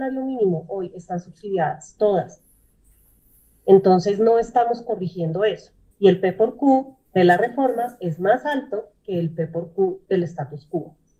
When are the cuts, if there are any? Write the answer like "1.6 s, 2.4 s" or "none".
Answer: 5.9 s, 7.1 s